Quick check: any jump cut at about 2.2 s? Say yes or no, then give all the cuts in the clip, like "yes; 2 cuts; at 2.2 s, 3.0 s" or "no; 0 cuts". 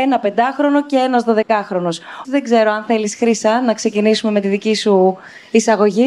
yes; 1 cut; at 2.2 s